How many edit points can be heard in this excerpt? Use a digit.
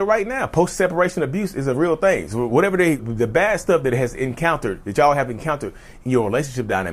1